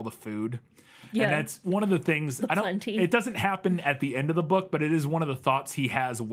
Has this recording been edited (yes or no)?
no